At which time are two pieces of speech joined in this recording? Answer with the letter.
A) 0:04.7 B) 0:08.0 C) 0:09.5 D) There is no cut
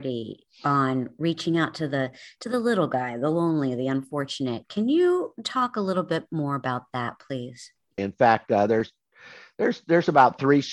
B